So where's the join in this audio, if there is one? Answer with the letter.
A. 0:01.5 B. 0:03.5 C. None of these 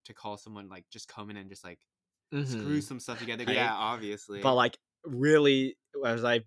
B